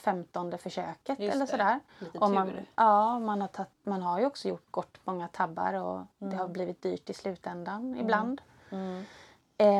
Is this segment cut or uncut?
uncut